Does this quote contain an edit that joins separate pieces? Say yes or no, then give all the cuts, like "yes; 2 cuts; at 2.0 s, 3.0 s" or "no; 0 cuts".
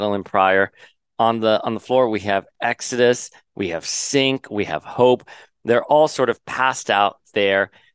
no; 0 cuts